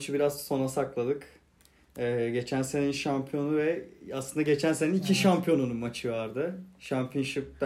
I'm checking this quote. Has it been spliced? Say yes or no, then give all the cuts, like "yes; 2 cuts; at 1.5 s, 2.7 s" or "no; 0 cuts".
no; 0 cuts